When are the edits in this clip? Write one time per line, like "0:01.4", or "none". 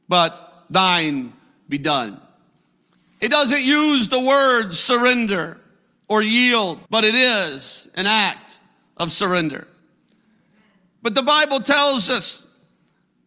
0:06.9